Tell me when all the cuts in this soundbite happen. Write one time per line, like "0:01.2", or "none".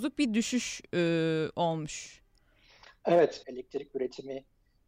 0:03.4